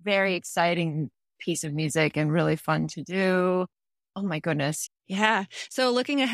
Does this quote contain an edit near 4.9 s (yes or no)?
yes